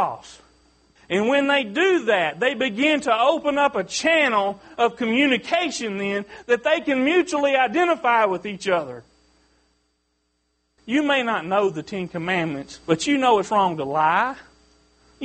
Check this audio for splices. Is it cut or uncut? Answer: cut